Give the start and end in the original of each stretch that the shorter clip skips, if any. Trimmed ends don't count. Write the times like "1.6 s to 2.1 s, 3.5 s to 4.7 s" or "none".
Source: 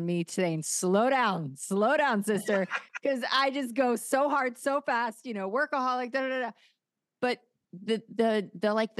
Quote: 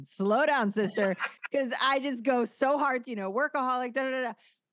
4.5 s to 5.2 s